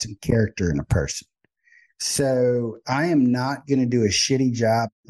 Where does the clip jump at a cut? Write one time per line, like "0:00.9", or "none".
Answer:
none